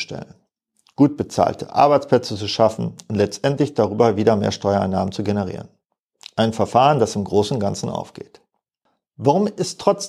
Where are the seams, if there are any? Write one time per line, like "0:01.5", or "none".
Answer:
none